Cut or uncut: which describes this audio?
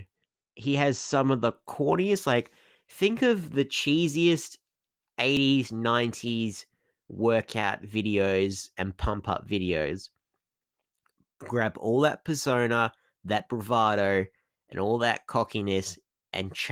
uncut